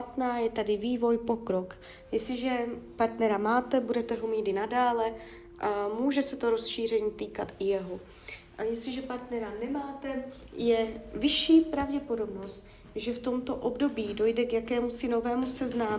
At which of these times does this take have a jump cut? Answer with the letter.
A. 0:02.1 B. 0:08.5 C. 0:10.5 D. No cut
D